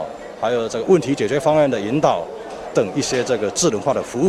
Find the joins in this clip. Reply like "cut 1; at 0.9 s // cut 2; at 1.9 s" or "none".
cut 1; at 2.7 s